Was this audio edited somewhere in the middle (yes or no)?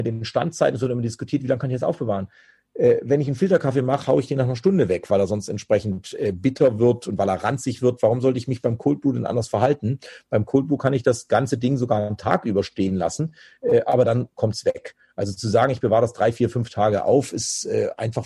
no